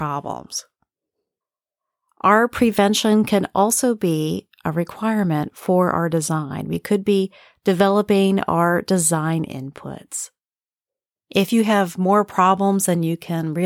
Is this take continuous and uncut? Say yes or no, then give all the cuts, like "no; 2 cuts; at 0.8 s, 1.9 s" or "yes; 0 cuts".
yes; 0 cuts